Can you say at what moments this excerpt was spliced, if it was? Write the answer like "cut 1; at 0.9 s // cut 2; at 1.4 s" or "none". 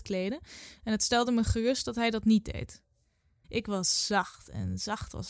cut 1; at 3.4 s